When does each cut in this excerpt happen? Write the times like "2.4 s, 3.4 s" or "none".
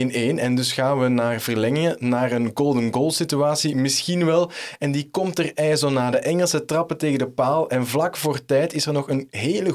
none